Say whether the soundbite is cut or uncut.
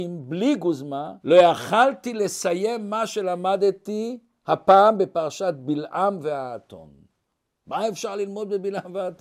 cut